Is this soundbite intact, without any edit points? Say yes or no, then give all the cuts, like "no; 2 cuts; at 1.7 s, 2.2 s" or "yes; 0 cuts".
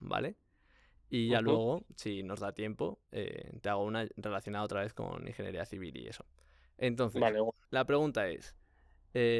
no; 1 cut; at 7.6 s